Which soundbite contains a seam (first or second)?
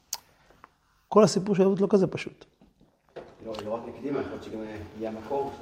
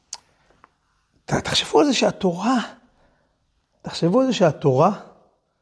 first